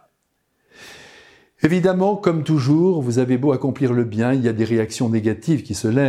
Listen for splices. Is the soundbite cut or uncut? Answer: uncut